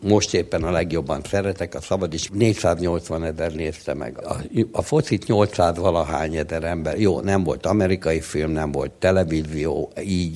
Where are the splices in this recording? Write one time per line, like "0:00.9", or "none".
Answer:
0:02.3
0:04.2